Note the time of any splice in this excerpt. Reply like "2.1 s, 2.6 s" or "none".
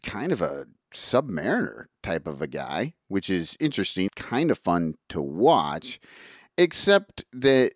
4.1 s

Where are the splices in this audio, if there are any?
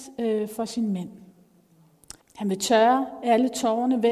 2.2 s

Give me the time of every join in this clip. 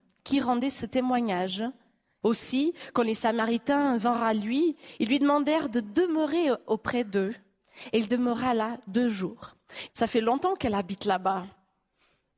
2.2 s, 9.9 s

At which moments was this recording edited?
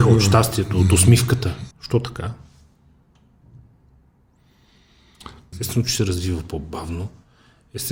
1.7 s, 5.5 s

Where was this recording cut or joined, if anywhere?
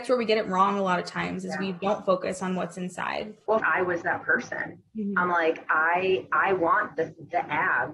3.6 s

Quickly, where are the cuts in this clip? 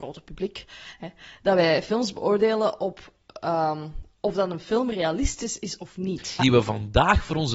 6.4 s

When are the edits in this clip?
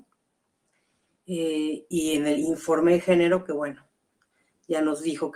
1.9 s

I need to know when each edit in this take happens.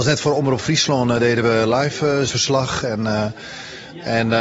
2.3 s

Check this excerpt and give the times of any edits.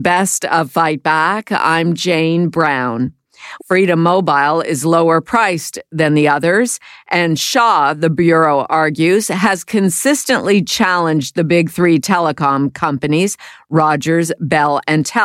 3.6 s

